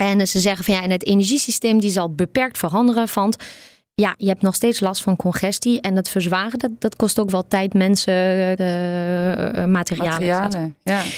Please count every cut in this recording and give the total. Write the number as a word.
one